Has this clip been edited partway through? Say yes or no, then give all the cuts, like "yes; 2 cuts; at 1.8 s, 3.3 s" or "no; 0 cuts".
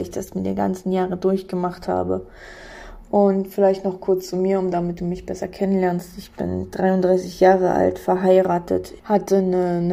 yes; 1 cut; at 9.0 s